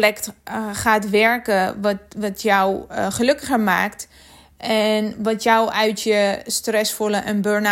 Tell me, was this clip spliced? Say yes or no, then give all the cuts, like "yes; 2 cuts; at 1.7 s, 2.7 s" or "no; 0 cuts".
no; 0 cuts